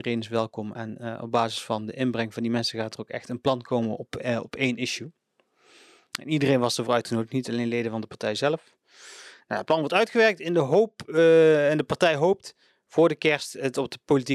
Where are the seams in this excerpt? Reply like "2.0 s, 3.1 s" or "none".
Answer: none